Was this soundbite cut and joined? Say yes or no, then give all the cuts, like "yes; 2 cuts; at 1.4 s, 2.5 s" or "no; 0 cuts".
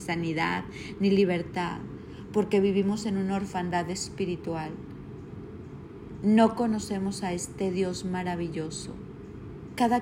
no; 0 cuts